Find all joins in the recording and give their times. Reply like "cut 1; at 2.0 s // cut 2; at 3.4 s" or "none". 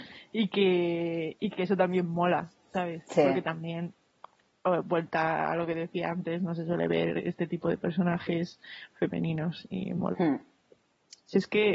none